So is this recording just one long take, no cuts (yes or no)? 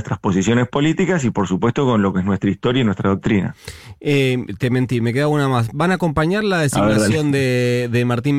yes